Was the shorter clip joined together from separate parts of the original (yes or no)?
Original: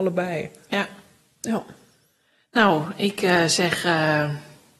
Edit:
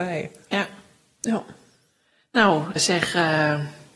yes